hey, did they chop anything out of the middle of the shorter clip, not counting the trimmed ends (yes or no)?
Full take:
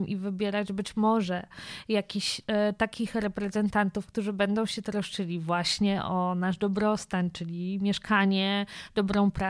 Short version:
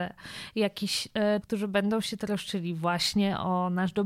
yes